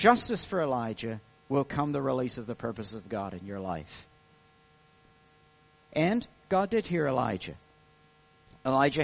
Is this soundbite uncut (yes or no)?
yes